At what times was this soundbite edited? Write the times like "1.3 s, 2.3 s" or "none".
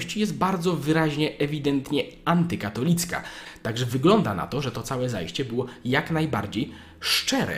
3.6 s